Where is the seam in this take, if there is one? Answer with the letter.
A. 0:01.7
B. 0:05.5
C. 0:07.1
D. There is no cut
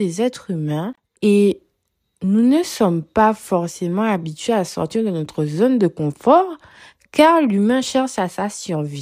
D